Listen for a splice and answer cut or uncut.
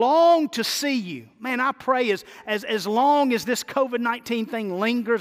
uncut